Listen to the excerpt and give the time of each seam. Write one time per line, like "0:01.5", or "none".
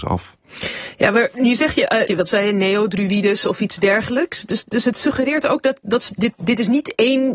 0:02.1